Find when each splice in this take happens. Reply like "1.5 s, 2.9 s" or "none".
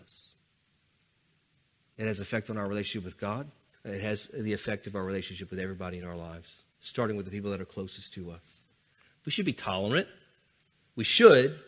3.7 s, 9.1 s